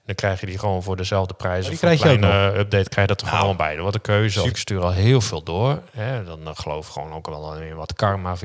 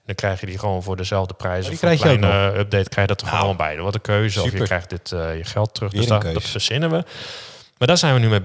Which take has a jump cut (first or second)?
first